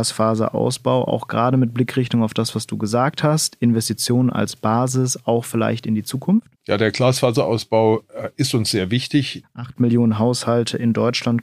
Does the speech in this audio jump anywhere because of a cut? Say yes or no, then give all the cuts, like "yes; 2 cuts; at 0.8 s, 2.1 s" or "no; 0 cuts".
yes; 2 cuts; at 6.6 s, 9.4 s